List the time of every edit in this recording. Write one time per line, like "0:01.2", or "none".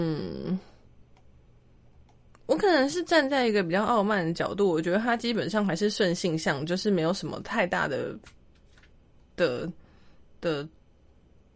none